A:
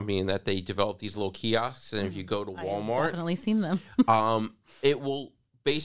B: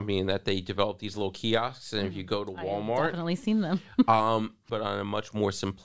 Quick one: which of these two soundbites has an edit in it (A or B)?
B